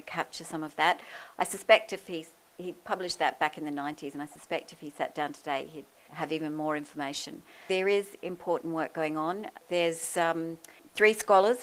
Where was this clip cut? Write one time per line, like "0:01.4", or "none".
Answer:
none

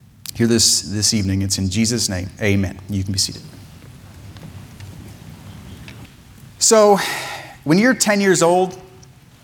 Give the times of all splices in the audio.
none

